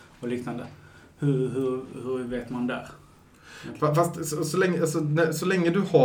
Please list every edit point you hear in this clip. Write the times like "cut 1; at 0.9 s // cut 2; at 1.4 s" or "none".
none